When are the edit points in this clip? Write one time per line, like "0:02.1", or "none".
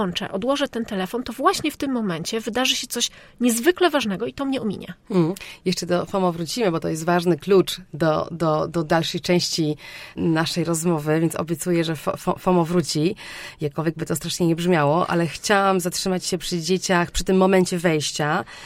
none